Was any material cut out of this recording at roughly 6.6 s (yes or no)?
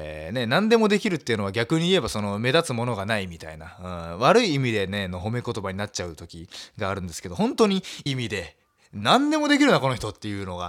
no